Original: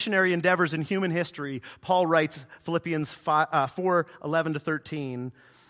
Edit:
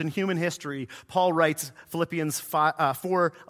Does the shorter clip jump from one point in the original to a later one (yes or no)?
no